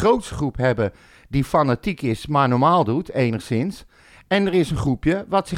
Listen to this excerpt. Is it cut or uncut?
uncut